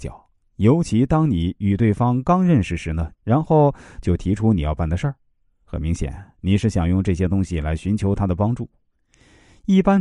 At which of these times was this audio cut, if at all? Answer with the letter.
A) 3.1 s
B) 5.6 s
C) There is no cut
A